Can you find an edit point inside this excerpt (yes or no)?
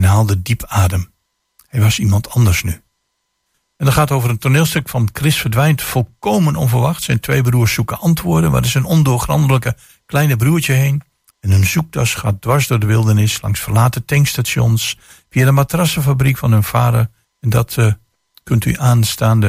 yes